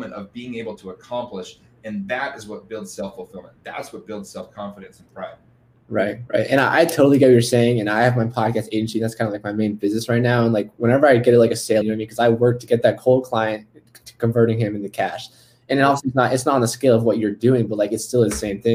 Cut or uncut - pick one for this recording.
cut